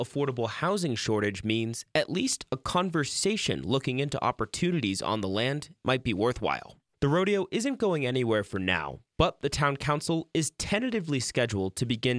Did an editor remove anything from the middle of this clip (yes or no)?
yes